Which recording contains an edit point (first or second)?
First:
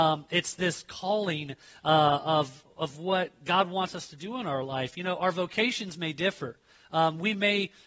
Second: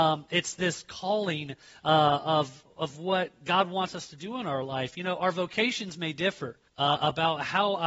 second